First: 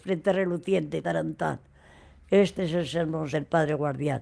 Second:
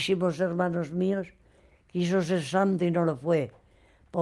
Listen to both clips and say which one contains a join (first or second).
first